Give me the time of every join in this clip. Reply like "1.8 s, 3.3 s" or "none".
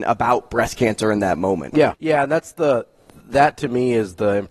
1.9 s